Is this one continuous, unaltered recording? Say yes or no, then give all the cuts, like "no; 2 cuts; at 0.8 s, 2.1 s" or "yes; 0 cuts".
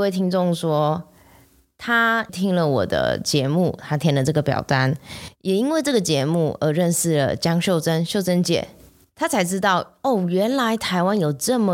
yes; 0 cuts